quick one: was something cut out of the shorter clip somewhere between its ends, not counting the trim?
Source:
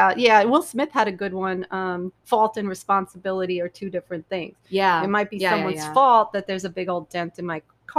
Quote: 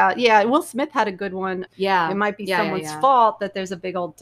yes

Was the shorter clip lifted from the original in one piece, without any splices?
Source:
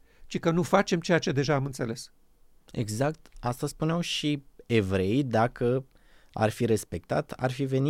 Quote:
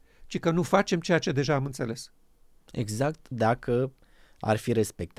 no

